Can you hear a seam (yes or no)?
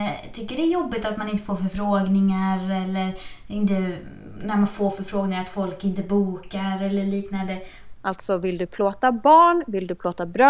yes